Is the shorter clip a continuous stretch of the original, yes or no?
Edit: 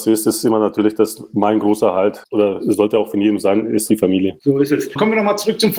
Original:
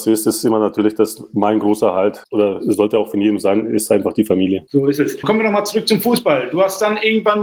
no